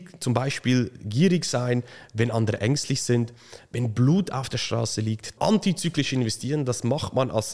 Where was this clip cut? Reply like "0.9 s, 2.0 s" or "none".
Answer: 5.4 s